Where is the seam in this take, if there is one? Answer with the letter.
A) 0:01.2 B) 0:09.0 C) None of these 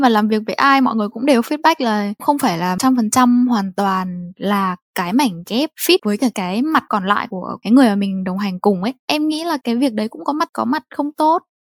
B